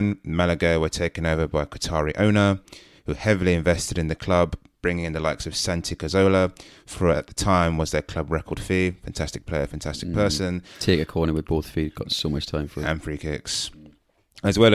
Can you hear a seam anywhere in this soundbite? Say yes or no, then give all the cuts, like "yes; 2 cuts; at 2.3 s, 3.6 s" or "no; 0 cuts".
no; 0 cuts